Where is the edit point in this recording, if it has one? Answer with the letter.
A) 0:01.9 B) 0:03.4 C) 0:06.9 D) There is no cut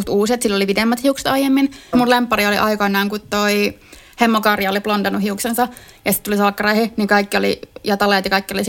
A